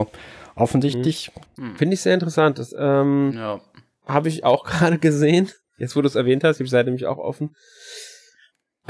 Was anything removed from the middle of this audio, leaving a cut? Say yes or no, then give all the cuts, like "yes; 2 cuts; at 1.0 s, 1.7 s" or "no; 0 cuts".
yes; 1 cut; at 1.5 s